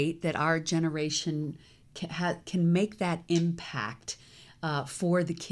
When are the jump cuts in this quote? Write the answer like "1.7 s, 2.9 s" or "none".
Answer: none